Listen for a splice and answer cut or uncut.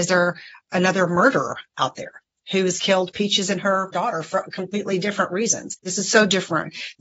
cut